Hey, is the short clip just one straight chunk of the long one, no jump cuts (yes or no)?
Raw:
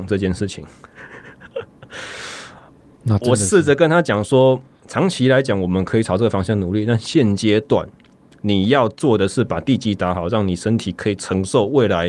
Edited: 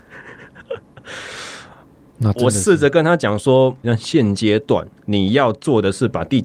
no